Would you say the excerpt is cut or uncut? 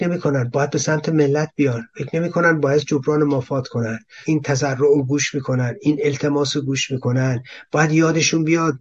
cut